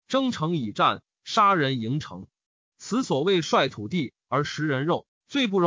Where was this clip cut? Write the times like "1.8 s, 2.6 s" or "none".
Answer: none